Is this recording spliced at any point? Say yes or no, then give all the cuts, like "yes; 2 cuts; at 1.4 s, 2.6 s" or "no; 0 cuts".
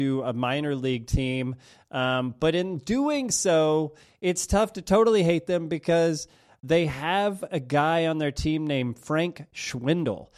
no; 0 cuts